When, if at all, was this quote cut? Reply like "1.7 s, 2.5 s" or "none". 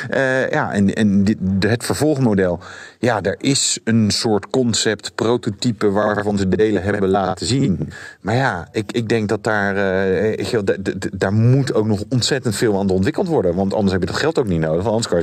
none